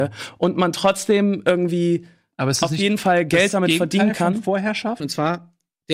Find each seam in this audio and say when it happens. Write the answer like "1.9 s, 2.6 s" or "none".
5.0 s